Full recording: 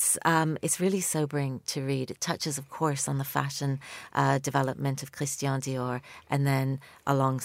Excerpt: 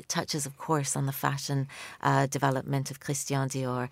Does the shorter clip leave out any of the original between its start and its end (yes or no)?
no